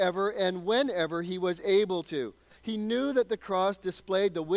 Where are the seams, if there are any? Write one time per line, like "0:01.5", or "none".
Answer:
0:02.6